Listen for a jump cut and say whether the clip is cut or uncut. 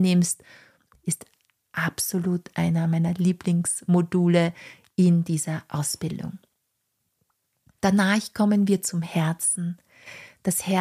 uncut